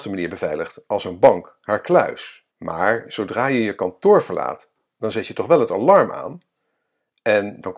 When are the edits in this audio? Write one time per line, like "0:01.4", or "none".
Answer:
0:02.5